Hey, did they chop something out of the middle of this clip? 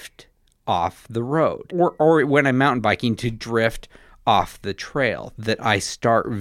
yes; 1 cut; at 1.7 s

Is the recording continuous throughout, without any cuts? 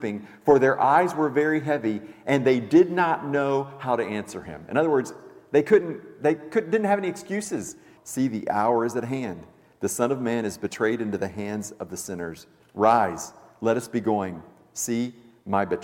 no; 1 cut; at 8.0 s

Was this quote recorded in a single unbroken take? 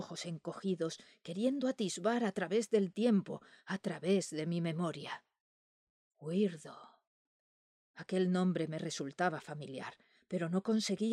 yes; 0 cuts

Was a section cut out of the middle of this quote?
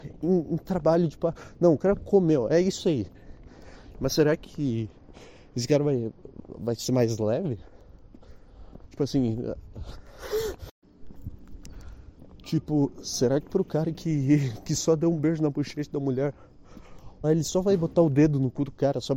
yes; 2 cuts; at 3.9 s, 17.2 s

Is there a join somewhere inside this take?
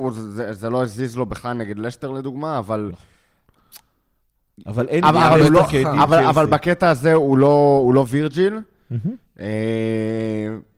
no; 0 cuts

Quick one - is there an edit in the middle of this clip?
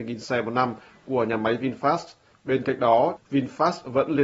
yes; 1 cut; at 3.2 s

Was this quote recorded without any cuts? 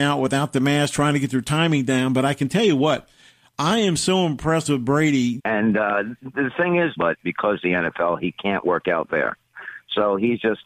no; 2 cuts; at 5.4 s, 7.0 s

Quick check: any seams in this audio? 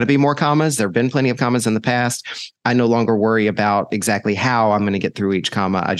no; 0 cuts

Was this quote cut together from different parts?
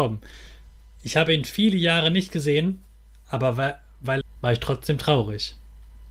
yes; 1 cut; at 4.2 s

